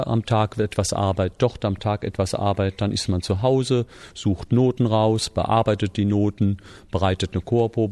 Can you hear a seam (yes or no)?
no